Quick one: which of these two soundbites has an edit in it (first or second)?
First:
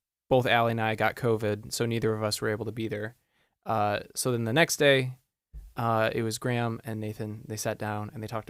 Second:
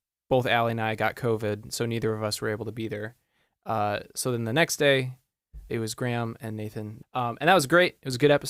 second